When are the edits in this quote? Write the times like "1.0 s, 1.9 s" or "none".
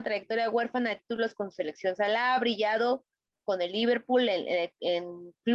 none